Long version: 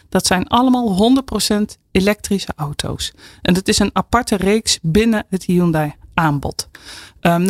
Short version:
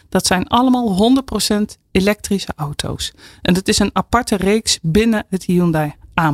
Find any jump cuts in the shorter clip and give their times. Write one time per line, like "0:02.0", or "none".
none